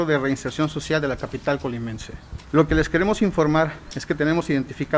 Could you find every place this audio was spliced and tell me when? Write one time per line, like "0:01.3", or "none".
0:02.4